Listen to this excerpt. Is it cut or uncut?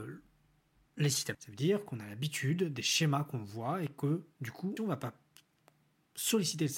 cut